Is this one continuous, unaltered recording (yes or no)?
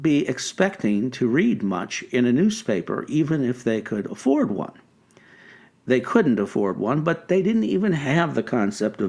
yes